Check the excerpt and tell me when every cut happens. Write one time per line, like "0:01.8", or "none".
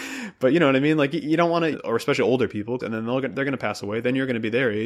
0:01.7
0:02.8